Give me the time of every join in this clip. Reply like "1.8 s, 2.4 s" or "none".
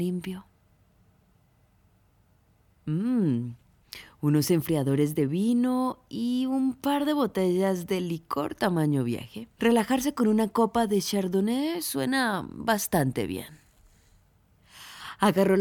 2.8 s, 9.5 s